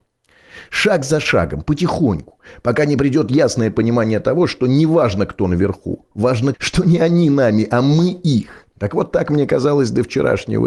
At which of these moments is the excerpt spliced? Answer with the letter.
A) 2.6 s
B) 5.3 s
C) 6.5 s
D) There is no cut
C